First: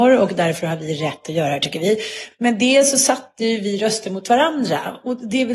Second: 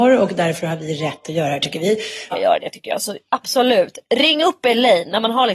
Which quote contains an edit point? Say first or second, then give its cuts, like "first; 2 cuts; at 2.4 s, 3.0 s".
second; 1 cut; at 2.3 s